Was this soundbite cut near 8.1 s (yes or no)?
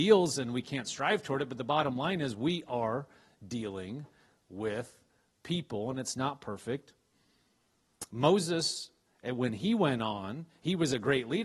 no